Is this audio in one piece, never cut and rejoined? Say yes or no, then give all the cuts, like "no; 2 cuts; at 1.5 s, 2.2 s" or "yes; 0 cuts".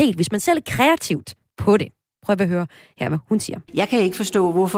no; 1 cut; at 3.7 s